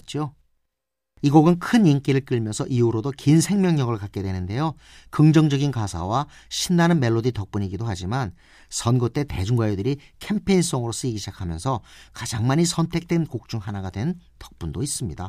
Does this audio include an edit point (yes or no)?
no